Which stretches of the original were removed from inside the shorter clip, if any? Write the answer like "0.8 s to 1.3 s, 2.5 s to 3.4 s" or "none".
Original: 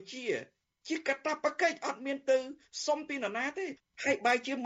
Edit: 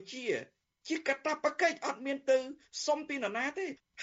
none